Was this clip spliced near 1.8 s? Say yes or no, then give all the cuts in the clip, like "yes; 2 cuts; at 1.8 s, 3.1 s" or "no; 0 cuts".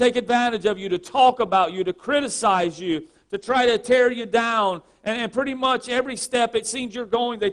no; 0 cuts